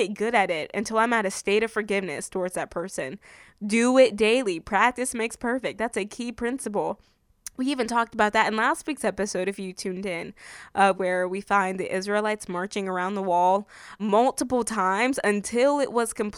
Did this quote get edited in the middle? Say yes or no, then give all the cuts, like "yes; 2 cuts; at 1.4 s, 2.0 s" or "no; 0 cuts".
yes; 2 cuts; at 10.9 s, 14.0 s